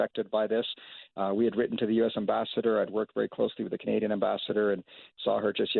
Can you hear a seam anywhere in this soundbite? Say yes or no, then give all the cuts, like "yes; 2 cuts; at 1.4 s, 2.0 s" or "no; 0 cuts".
no; 0 cuts